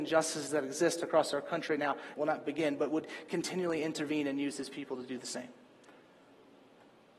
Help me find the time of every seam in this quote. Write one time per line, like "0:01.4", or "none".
0:02.2